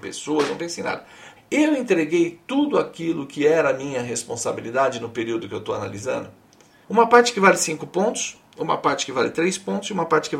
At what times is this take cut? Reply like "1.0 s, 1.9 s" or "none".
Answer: 1.4 s, 6.8 s